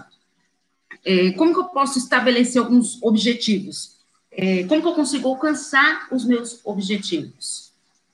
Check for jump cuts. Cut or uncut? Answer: cut